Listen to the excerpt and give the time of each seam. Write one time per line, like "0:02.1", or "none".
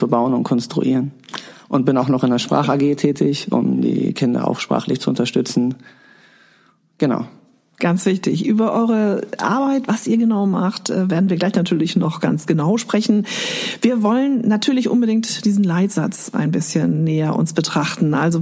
none

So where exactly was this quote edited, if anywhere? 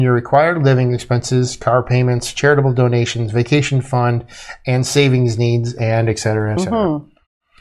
0:06.6

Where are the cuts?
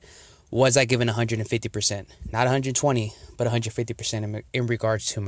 none

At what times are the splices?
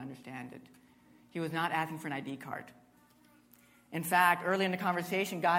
none

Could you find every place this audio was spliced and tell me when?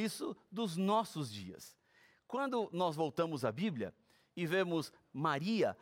none

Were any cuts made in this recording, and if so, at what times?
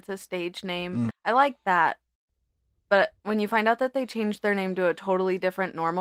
0:01.1
0:03.2

